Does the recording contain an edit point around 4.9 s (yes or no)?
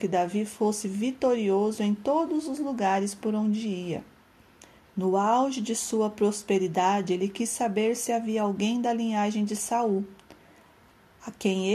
yes